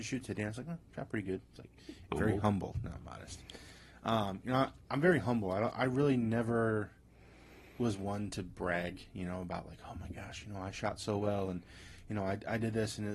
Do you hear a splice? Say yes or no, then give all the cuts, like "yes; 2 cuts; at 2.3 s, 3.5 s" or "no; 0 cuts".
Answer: yes; 1 cut; at 2.1 s